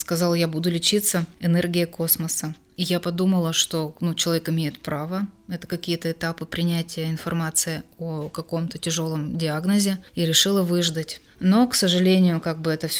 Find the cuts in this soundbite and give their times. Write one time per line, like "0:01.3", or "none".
0:11.3